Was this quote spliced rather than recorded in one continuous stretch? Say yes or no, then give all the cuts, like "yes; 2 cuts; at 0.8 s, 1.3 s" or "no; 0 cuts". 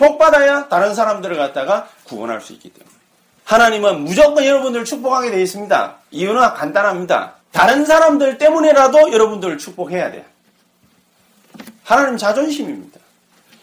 yes; 2 cuts; at 3.4 s, 7.4 s